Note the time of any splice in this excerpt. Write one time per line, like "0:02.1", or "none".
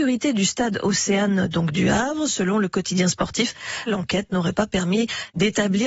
0:03.9